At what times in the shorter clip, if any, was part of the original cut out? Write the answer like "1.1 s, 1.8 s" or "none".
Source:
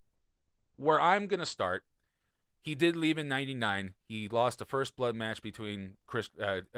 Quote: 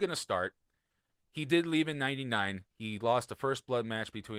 none